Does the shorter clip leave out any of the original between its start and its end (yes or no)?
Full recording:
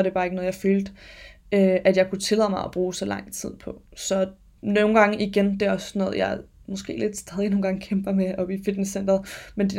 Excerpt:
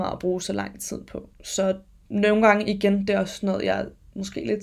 no